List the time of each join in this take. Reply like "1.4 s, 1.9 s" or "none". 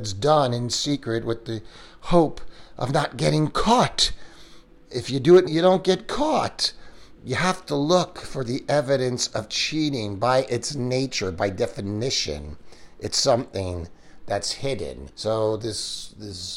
5.5 s, 15.1 s